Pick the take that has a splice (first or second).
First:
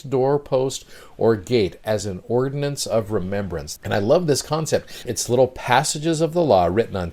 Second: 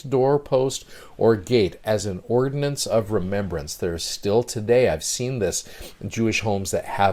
first